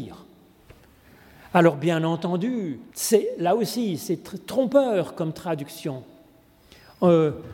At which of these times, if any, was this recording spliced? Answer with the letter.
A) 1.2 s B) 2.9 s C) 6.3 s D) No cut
B